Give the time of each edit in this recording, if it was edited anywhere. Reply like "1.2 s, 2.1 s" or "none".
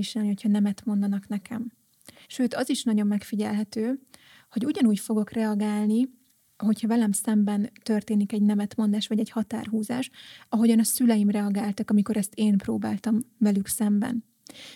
2.2 s